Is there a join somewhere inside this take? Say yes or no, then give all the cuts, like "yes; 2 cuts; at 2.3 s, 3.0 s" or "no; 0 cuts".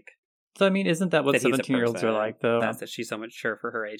yes; 1 cut; at 2.6 s